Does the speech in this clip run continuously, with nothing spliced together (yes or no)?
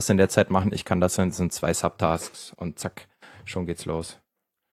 yes